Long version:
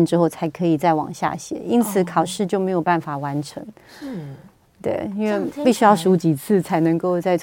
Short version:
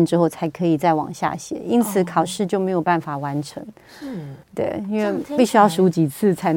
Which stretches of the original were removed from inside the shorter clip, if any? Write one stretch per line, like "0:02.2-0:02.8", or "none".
0:04.4-0:04.7